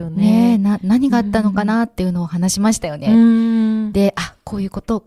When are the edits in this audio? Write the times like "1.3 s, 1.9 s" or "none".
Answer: none